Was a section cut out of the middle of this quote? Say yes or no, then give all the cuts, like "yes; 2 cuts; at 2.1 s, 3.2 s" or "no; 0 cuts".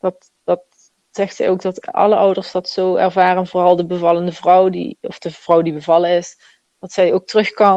yes; 1 cut; at 5.0 s